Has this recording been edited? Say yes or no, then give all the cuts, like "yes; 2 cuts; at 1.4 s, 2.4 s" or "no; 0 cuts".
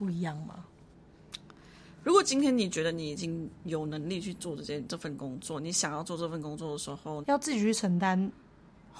yes; 1 cut; at 7.2 s